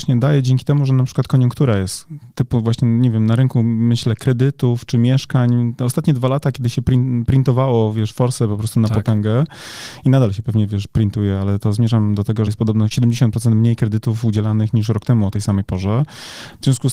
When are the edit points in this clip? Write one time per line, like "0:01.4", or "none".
0:12.5